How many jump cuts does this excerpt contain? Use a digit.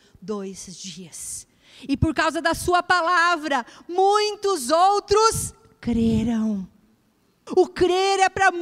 1